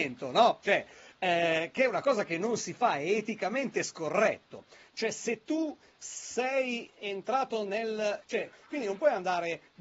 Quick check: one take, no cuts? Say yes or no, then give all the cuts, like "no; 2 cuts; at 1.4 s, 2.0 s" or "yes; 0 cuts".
no; 1 cut; at 8.2 s